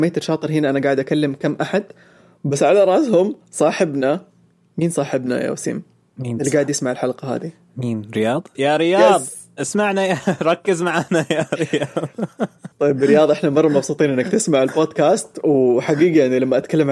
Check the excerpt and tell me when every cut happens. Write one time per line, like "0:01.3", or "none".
0:08.5
0:12.7

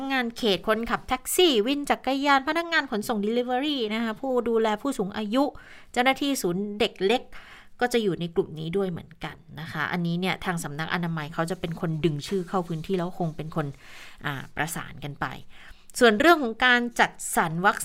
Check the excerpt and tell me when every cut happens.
none

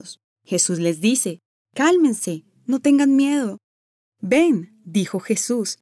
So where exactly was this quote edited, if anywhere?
0:02.6
0:04.1

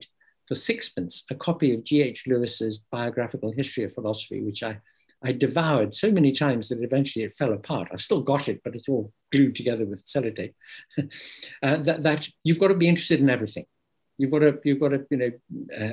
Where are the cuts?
0:12.4

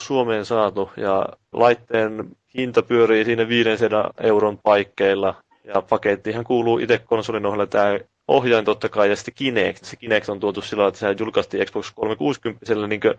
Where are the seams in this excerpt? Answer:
0:01.5
0:09.8

